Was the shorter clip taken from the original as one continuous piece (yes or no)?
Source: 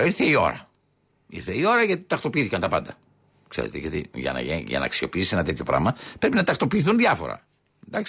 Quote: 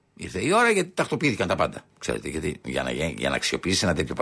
no